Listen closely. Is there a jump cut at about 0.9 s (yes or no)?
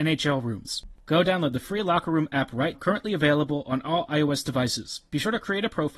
yes